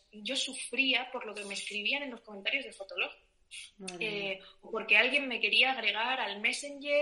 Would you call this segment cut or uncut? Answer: uncut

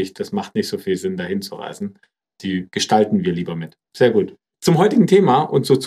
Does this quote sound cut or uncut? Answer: cut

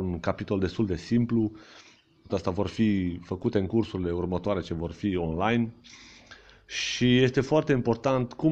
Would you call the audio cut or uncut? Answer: cut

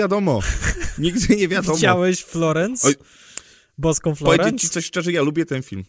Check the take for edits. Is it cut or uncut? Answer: uncut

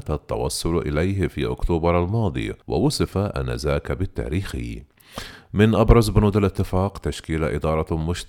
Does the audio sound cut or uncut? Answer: cut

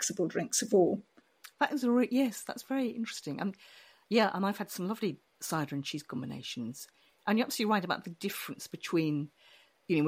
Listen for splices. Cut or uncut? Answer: uncut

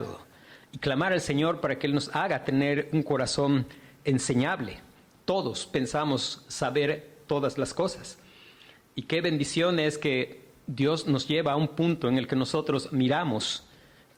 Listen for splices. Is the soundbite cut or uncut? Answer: uncut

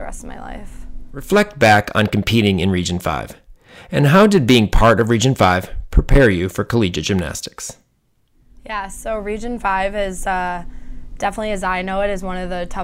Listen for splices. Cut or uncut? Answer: uncut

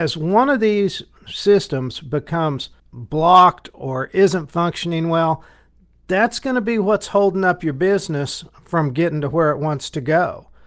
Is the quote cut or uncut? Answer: cut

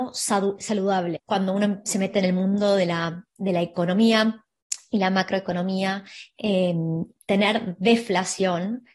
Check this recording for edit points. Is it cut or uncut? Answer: cut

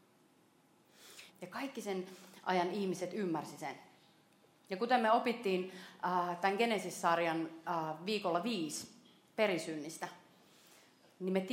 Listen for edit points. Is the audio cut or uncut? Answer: cut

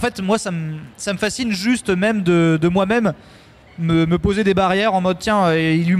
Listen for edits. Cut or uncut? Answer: cut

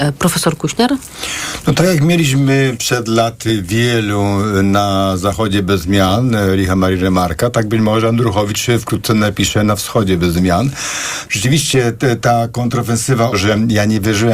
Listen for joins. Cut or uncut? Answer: cut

